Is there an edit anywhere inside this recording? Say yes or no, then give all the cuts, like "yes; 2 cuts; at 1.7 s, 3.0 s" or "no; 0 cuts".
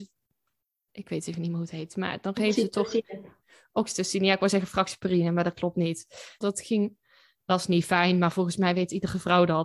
yes; 1 cut; at 6.4 s